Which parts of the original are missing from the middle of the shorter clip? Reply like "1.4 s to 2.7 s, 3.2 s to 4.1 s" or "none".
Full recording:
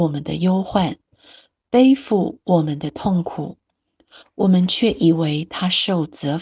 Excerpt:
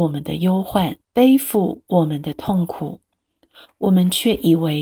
1.0 s to 1.6 s

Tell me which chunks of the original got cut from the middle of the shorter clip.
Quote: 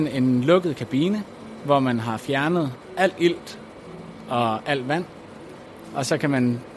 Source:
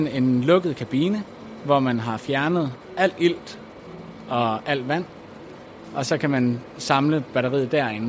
none

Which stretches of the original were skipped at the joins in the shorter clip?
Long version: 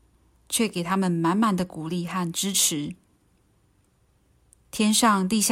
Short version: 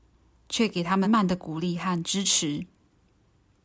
1.0 s to 1.3 s

